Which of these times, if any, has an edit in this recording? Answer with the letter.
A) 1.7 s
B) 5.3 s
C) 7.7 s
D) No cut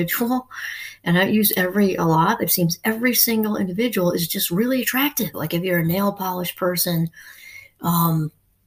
B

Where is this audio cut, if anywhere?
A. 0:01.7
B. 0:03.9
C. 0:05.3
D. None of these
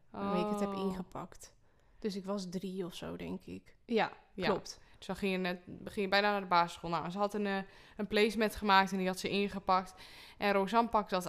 B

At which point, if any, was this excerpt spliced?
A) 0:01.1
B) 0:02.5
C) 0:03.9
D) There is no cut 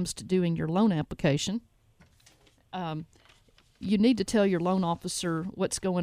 D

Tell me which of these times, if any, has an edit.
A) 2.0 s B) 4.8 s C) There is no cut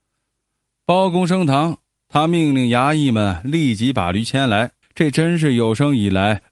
B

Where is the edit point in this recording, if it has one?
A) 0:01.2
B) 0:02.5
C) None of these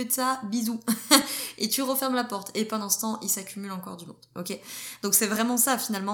C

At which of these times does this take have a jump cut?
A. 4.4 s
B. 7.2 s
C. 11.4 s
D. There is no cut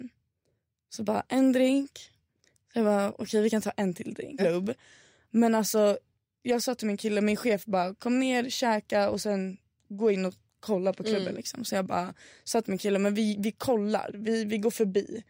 A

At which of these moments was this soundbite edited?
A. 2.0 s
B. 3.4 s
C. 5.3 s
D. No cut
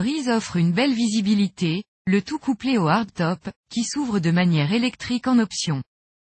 A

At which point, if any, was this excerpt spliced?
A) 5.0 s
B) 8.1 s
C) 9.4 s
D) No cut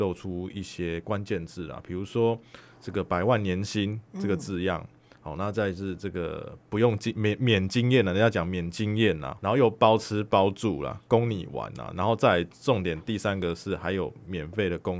C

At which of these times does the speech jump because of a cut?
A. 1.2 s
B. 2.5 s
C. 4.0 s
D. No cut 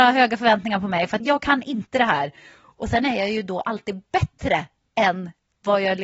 A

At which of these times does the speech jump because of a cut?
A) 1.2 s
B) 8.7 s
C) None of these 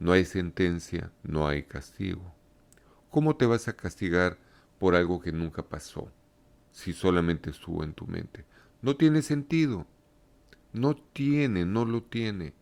A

